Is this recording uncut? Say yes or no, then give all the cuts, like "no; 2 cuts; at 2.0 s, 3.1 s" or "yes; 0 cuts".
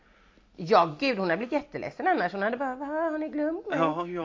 yes; 0 cuts